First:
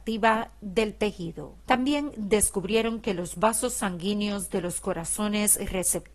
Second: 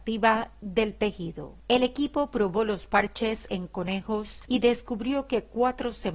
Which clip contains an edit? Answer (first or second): first